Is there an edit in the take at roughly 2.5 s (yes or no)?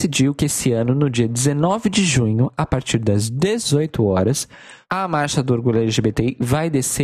no